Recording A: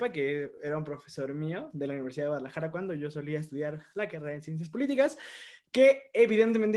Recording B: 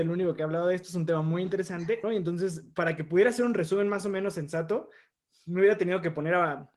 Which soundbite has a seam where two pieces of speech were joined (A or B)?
B